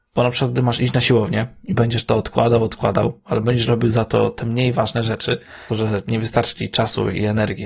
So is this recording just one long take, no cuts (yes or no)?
no